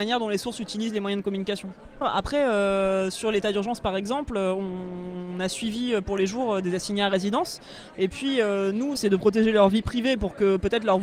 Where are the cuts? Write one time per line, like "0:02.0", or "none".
0:07.9
0:08.9